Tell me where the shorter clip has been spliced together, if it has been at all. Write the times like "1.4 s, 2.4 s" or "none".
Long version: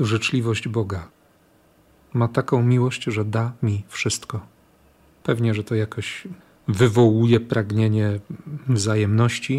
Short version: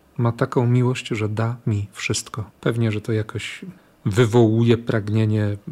2.5 s